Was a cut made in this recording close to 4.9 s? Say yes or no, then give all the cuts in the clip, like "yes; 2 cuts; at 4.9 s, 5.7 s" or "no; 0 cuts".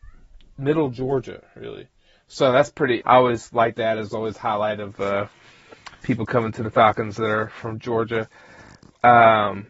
no; 1 cut; at 3.0 s